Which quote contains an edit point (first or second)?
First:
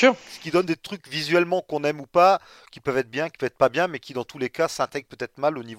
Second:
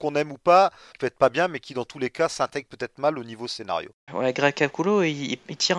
second